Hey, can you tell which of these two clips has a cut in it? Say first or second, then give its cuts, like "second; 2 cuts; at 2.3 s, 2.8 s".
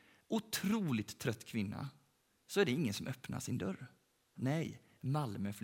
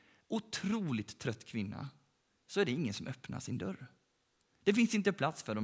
first; 1 cut; at 4.4 s